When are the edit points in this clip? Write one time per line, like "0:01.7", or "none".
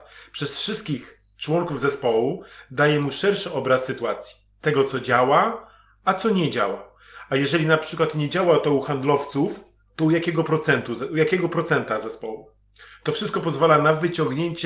none